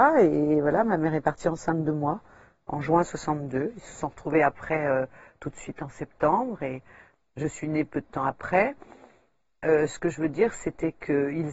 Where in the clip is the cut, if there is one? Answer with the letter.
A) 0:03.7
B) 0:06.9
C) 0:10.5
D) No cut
D